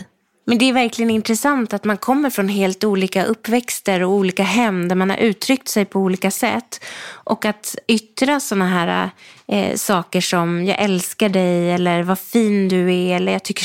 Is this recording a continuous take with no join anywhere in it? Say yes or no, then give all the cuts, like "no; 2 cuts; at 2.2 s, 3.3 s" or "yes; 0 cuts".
yes; 0 cuts